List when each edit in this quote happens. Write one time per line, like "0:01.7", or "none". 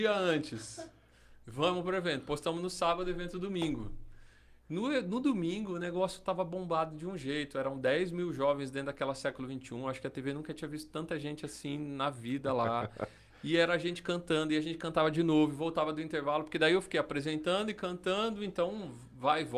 none